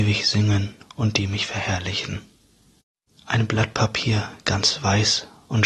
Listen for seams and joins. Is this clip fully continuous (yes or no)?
yes